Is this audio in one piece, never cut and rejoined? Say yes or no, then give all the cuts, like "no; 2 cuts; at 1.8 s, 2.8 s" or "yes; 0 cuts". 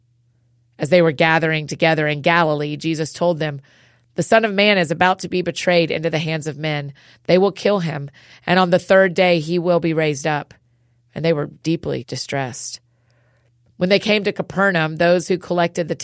yes; 0 cuts